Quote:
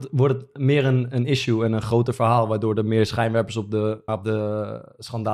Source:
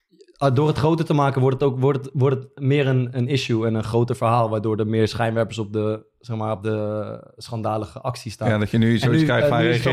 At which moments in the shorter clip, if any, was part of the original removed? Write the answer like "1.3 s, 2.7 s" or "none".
4.1 s

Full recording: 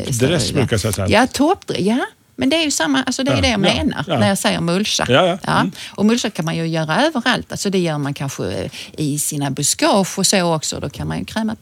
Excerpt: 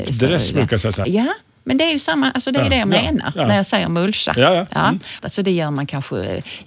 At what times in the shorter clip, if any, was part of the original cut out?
1.0 s, 5.2 s

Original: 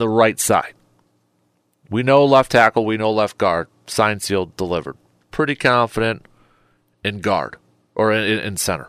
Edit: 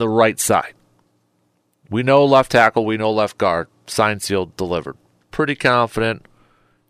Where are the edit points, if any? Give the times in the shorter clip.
none

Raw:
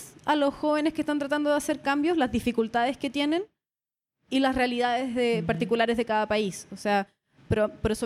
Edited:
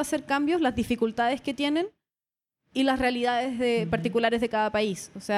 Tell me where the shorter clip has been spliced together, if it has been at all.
none

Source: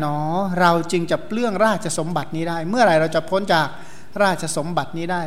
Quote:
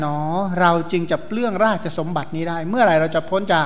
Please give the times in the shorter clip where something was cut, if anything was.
none

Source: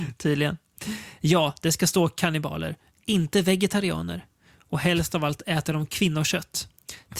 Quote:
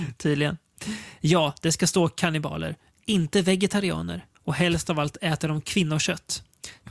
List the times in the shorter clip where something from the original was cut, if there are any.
4.3 s

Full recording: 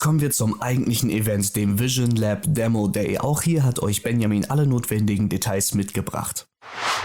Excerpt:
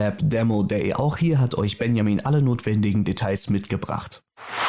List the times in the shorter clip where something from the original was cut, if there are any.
none

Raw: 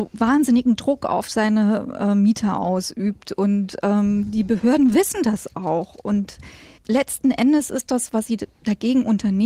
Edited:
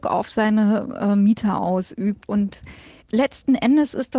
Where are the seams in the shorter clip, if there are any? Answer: 2.3 s

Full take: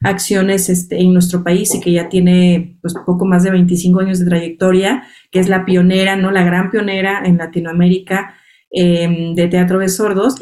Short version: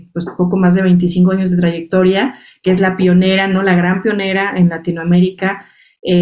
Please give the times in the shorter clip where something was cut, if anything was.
none

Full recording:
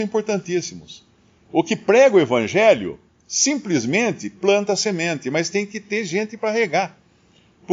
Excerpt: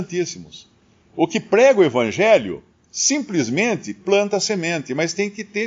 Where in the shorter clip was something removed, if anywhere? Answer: none

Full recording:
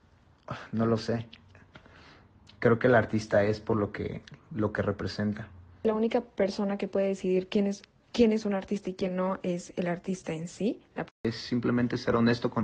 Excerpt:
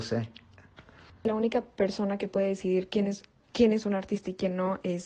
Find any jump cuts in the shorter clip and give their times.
1.1 s

